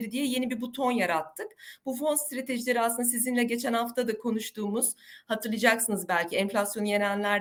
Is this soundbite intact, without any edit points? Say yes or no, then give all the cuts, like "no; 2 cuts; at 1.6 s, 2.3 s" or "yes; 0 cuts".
yes; 0 cuts